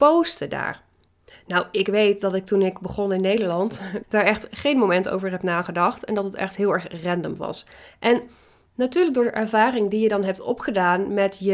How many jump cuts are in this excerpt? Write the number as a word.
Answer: one